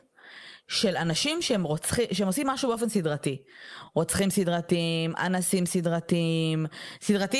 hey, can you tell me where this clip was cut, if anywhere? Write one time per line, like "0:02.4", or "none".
none